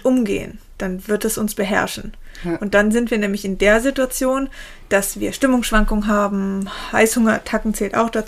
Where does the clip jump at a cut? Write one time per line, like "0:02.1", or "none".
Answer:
none

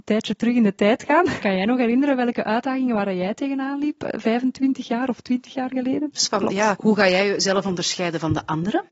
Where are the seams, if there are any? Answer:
0:01.4
0:06.2

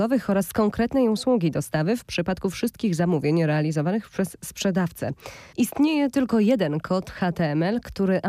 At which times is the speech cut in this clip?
0:05.5

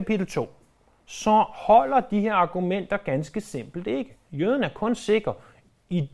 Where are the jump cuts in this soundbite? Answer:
0:04.3

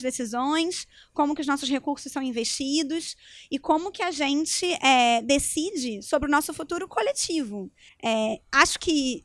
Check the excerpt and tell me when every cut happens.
0:07.9

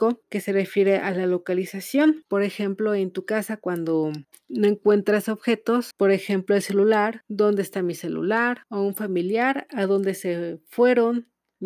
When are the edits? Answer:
0:02.2

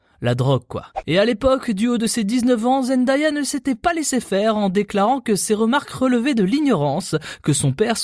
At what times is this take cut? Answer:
none

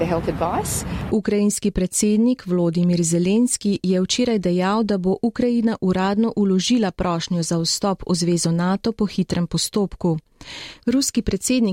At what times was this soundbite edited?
0:01.1
0:10.8

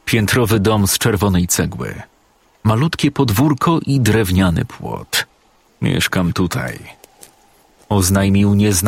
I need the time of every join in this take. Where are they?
0:05.7

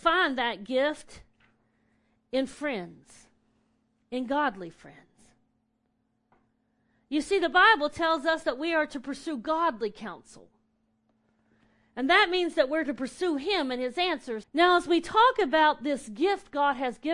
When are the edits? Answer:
0:14.4

